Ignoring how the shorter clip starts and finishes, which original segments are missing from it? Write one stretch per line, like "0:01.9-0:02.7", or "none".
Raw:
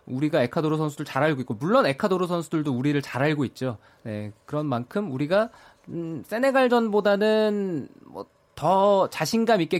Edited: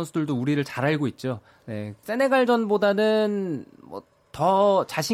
0:04.4-0:06.3